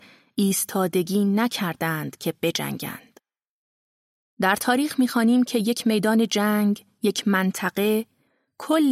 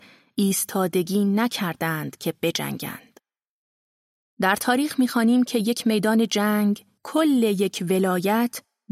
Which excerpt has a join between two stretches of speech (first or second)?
second